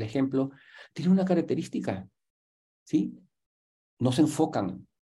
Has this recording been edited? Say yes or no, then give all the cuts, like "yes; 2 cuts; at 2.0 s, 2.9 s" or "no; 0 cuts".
no; 0 cuts